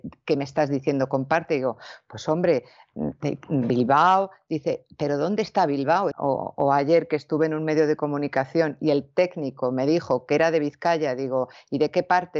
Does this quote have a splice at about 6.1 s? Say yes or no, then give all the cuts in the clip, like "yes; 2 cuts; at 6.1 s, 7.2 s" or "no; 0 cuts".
yes; 1 cut; at 6.1 s